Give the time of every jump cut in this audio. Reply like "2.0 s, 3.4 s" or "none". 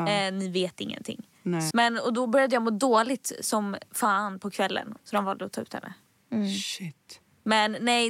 1.7 s, 5.0 s